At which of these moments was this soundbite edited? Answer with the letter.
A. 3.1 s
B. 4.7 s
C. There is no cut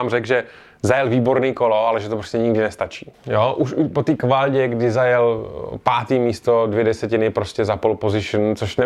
A